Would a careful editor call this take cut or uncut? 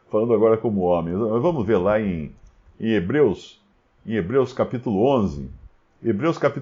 uncut